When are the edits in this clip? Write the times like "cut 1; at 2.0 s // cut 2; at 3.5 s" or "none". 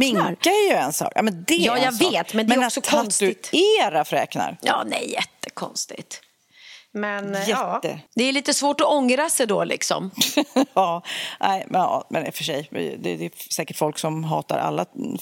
cut 1; at 8.1 s